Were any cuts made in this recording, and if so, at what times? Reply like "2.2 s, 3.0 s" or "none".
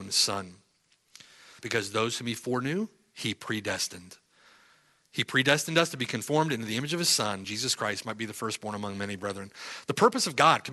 1.6 s, 7.4 s